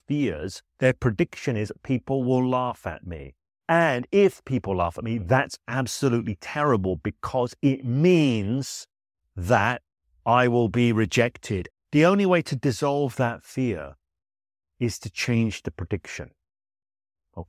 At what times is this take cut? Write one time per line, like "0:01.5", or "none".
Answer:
0:11.7